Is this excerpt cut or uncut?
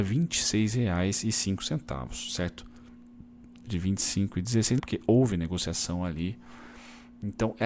cut